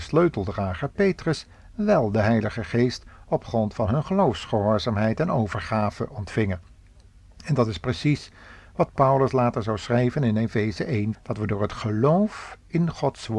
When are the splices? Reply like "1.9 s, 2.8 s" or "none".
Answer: 11.1 s